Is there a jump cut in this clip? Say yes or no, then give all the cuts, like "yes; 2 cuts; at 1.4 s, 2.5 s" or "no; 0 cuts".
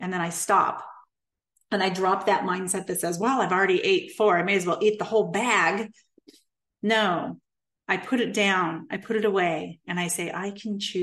no; 0 cuts